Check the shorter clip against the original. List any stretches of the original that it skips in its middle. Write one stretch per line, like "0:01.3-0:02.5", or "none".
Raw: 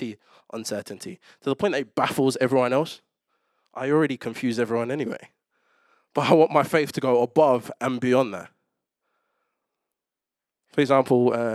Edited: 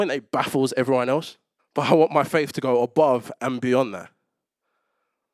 0:03.2-0:06.0